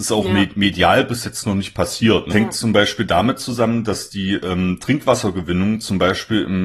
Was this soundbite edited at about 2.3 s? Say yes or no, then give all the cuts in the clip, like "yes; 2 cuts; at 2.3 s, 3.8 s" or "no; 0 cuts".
yes; 1 cut; at 2.3 s